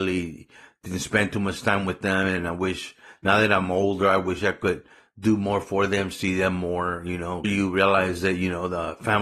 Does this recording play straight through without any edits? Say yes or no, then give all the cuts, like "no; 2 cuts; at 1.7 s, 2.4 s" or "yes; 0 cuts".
no; 1 cut; at 7.4 s